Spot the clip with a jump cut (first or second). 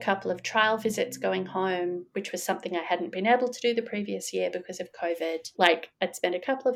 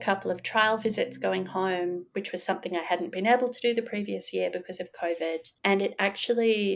first